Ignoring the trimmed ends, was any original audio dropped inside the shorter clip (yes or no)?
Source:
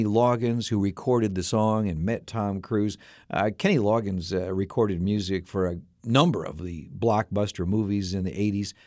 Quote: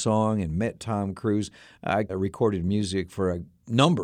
yes